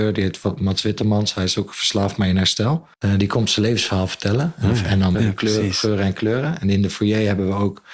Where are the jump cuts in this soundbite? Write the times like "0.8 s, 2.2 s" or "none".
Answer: 2.9 s, 5.1 s